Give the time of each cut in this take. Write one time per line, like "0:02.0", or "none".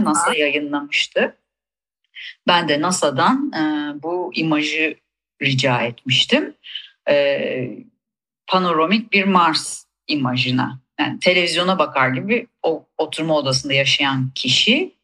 none